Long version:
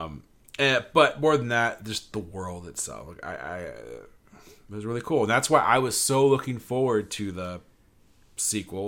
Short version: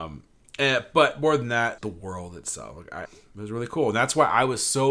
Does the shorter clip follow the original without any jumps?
no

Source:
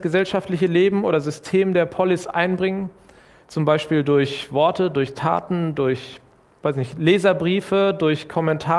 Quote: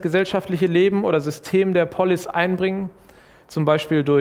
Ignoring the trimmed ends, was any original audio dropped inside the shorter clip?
no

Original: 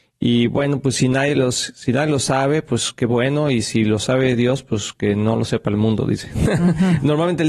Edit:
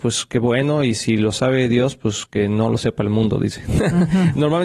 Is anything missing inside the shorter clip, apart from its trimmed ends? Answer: no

